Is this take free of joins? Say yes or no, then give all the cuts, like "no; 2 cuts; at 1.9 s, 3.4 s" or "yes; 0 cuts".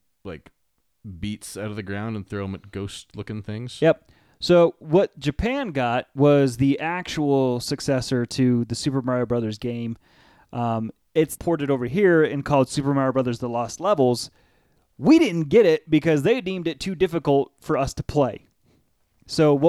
no; 1 cut; at 11.4 s